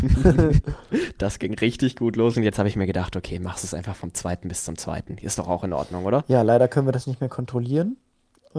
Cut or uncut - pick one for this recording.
uncut